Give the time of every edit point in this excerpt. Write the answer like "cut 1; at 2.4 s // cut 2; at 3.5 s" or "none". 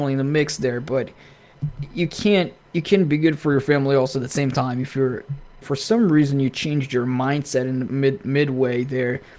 cut 1; at 5.6 s // cut 2; at 7.9 s